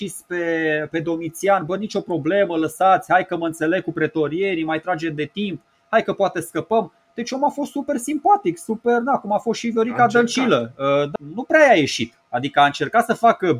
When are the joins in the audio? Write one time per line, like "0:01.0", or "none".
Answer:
0:11.2